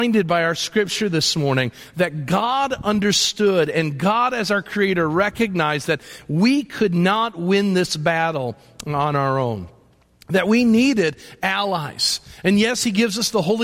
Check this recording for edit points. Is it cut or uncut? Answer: uncut